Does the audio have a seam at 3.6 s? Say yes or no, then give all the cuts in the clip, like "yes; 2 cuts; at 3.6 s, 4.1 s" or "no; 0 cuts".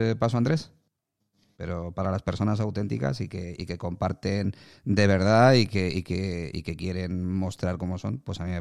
no; 1 cut; at 1.5 s